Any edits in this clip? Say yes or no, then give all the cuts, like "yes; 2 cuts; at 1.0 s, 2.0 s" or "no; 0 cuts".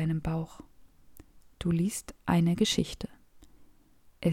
yes; 1 cut; at 1.4 s